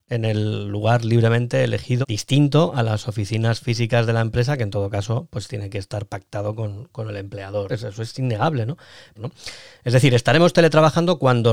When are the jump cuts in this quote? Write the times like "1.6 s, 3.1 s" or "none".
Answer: 2.0 s, 7.7 s, 9.2 s